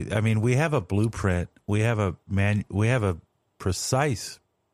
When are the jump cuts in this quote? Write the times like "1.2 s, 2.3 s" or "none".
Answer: none